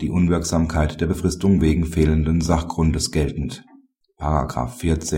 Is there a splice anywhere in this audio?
yes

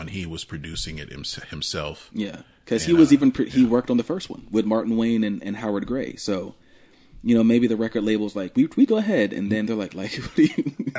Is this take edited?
yes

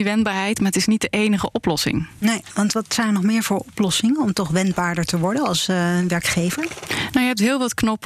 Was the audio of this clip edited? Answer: no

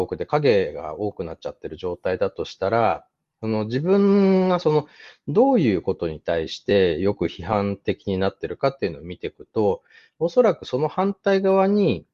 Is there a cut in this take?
no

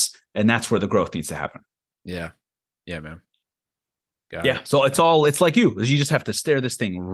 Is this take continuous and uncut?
yes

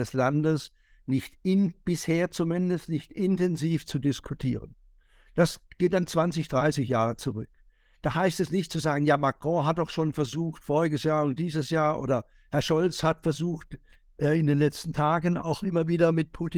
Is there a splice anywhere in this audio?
no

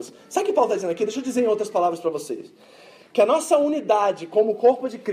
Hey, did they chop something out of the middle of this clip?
no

